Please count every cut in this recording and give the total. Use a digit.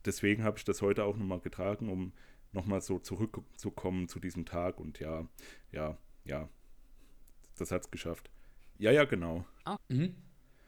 2